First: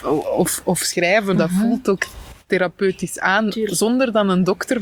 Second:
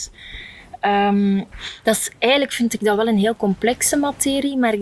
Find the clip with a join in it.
first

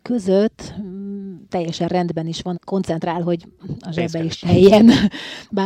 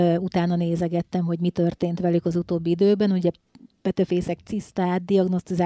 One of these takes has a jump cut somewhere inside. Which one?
first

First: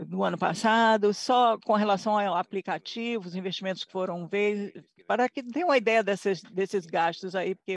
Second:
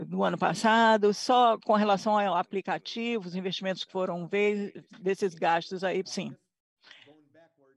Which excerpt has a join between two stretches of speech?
second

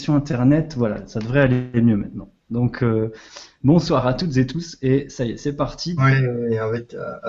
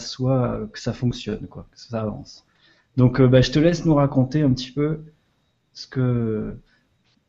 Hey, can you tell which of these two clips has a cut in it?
first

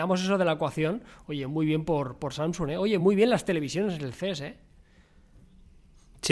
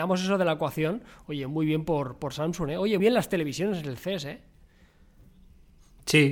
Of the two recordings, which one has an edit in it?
second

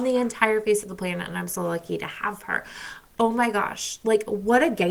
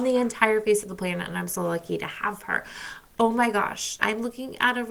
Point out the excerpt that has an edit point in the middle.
second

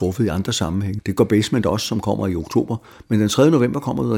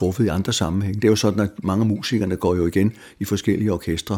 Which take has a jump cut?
first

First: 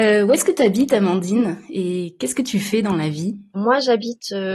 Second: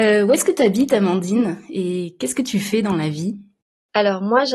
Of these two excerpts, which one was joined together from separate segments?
first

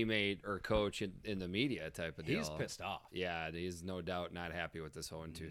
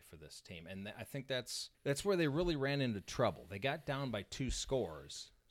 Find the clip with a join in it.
second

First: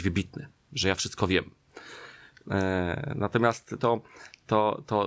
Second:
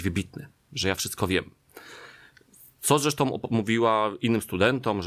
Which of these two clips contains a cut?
first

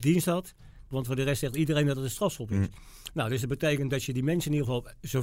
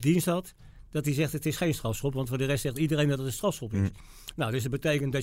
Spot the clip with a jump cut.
first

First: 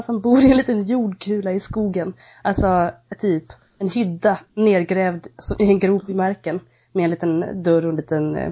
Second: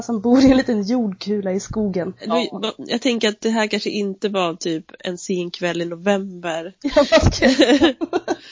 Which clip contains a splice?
second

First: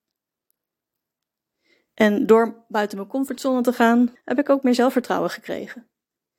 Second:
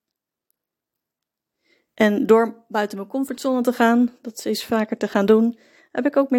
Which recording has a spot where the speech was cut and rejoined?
first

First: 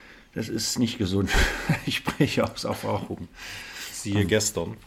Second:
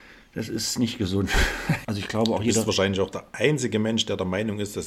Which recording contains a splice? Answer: second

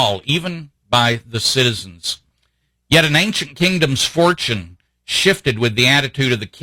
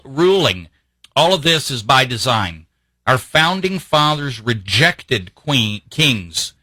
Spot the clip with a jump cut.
second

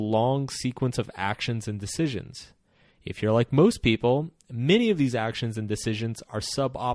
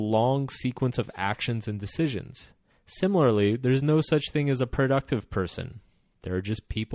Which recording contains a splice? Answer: second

